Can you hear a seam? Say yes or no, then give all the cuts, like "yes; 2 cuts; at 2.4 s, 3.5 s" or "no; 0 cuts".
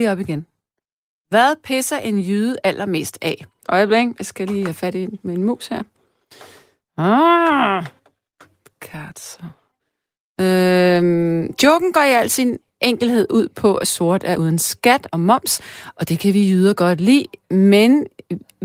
yes; 1 cut; at 3.6 s